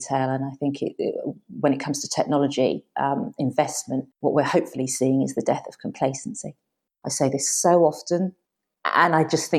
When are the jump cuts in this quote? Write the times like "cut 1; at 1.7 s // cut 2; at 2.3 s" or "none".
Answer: cut 1; at 4.1 s // cut 2; at 6.9 s